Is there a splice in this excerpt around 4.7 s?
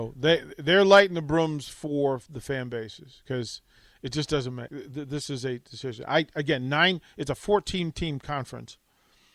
yes; 1 cut; at 4.7 s

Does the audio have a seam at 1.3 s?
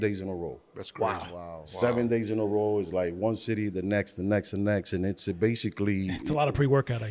no; 0 cuts

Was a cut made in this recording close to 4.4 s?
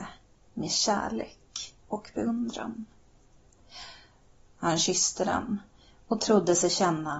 yes; 1 cut; at 4.4 s

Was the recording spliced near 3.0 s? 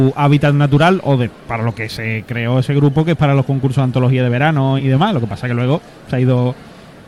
no; 1 cut; at 4.8 s

